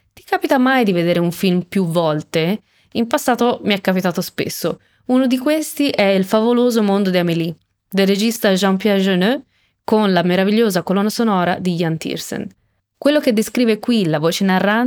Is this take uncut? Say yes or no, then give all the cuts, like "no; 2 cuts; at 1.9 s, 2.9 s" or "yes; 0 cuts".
no; 1 cut; at 12.8 s